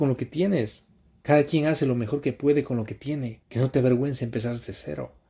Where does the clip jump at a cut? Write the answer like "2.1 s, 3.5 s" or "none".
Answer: 1.2 s, 3.4 s